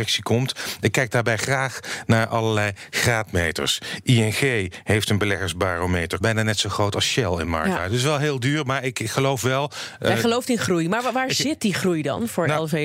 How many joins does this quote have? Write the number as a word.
one